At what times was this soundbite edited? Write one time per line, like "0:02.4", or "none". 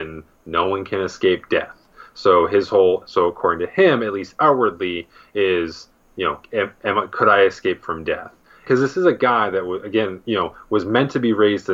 0:08.7